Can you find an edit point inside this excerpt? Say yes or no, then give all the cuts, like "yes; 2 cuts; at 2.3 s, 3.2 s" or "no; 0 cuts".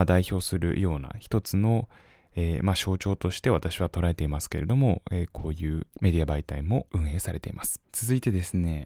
yes; 1 cut; at 7.8 s